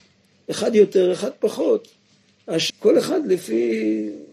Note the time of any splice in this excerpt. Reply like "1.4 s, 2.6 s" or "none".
2.7 s